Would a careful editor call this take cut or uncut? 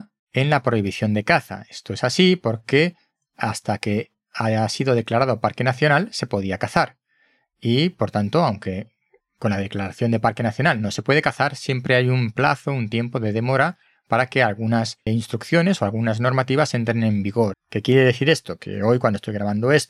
cut